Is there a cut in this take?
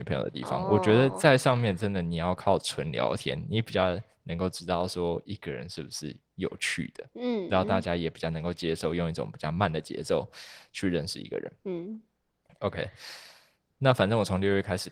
no; 0 cuts

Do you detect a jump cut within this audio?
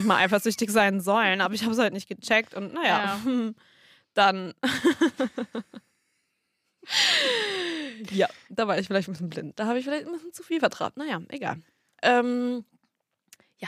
no; 0 cuts

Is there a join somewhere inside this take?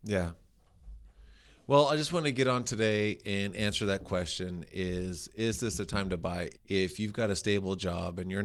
yes; 1 cut; at 6.5 s

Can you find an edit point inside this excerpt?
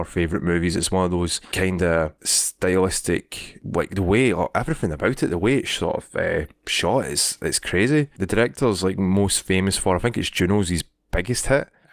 no; 0 cuts

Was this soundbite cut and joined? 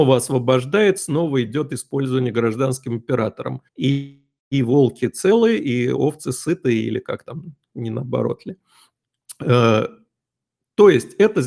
yes; 1 cut; at 3.7 s

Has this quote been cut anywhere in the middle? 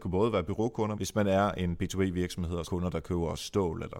yes; 2 cuts; at 0.9 s, 2.6 s

